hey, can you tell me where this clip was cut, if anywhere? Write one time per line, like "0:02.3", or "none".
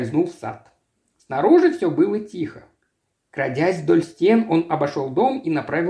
none